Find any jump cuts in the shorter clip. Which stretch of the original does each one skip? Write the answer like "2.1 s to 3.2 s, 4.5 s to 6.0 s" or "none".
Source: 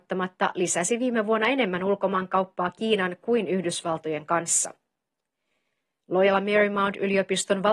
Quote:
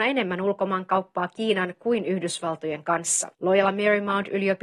4.8 s to 6.0 s